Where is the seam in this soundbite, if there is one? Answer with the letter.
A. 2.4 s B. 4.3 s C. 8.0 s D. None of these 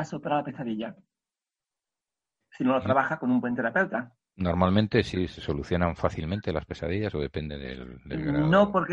A